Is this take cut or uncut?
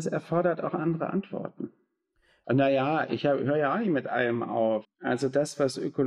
cut